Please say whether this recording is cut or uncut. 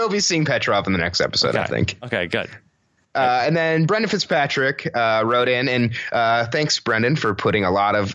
uncut